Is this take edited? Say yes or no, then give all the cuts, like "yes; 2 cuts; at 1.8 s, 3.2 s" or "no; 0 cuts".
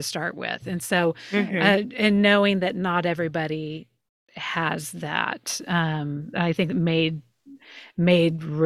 no; 0 cuts